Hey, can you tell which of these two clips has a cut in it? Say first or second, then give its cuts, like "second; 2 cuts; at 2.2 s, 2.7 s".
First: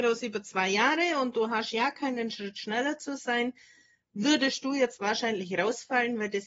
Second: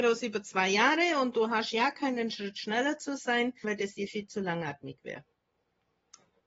second; 1 cut; at 3.6 s